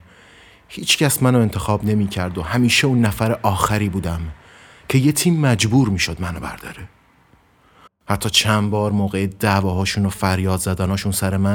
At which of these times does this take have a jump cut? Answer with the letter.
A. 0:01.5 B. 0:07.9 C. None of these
B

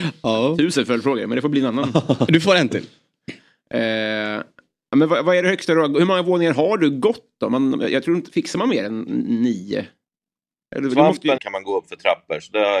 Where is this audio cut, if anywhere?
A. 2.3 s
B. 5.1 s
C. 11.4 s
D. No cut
C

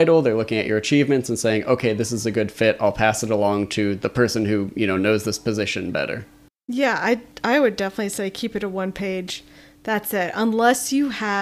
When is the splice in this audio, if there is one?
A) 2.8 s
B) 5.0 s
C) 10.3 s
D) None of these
D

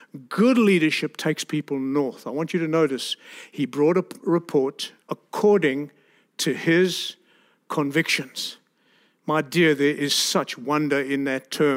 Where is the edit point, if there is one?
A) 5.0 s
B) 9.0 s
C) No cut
A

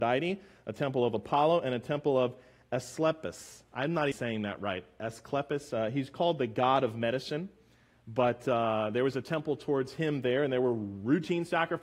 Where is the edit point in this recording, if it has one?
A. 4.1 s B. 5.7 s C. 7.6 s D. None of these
A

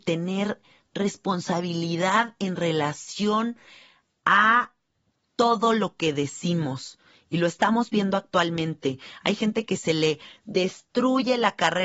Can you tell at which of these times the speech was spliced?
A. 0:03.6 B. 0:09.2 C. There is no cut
C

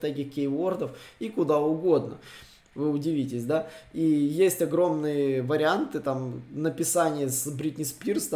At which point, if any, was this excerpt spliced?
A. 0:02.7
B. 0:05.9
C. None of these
A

